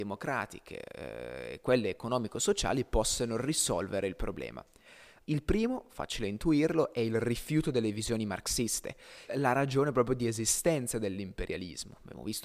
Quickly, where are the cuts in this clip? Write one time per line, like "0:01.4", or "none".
0:05.2
0:09.3